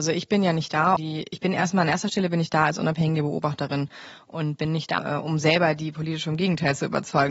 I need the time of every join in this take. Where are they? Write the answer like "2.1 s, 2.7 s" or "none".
1.0 s, 5.0 s